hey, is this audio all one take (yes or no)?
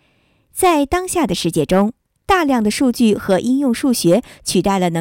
yes